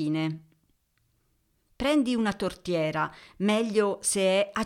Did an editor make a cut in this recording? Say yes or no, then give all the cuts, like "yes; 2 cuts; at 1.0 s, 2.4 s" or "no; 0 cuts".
no; 0 cuts